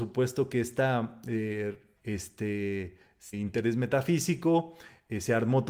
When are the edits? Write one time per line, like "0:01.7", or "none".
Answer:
0:02.0
0:03.3